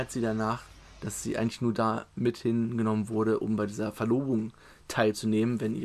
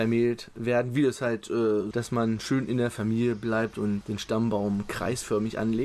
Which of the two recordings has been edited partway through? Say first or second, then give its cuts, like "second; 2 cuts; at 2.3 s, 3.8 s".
second; 2 cuts; at 1.9 s, 4.0 s